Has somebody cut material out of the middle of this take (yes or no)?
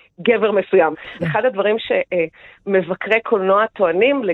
yes